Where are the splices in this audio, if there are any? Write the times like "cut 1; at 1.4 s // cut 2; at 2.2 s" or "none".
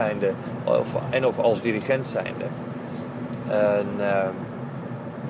none

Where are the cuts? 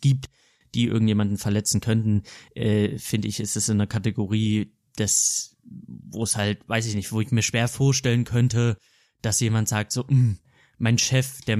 none

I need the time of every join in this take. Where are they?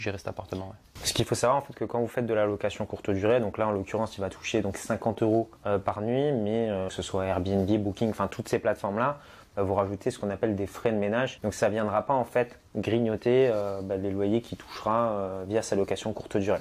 cut 1; at 5.6 s // cut 2; at 6.9 s // cut 3; at 11.4 s

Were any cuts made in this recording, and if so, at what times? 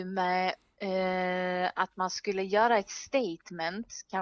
none

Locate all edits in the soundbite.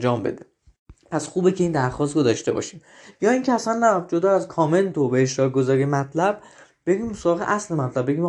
none

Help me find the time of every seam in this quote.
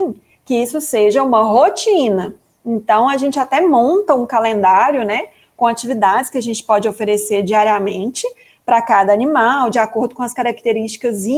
none

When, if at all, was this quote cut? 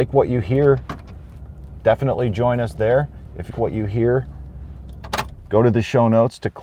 cut 1; at 3.5 s

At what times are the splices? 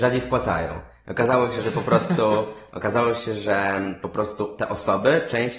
cut 1; at 2.7 s

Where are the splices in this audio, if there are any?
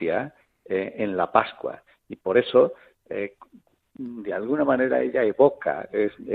none

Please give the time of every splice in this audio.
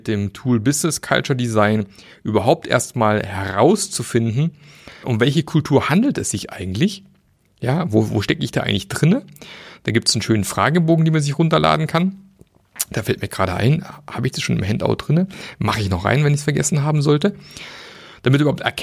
cut 1; at 5.0 s

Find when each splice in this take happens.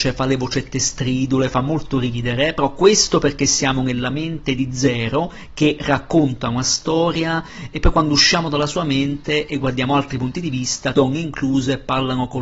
cut 1; at 10.9 s

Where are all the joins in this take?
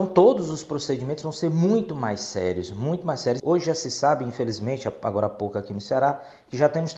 cut 1; at 3.4 s

